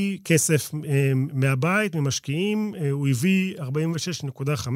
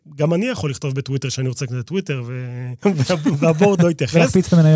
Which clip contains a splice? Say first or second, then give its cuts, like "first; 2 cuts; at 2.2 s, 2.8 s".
second; 1 cut; at 2.8 s